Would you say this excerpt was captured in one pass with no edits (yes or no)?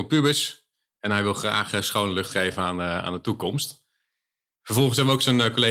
yes